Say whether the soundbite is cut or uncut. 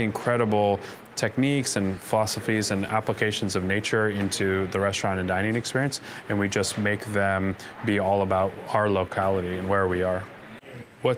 uncut